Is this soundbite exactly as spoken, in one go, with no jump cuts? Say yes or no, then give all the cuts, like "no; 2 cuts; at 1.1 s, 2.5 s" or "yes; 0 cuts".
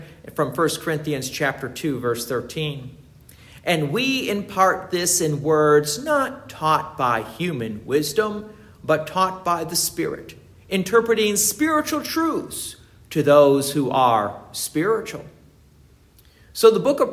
yes; 0 cuts